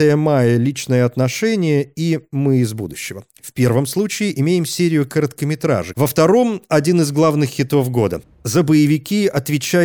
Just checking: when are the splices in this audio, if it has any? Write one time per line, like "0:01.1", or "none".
0:05.9
0:08.2